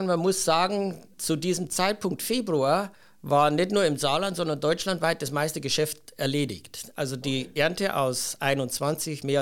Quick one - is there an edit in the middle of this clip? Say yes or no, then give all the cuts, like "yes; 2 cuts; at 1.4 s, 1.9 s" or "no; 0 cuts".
no; 0 cuts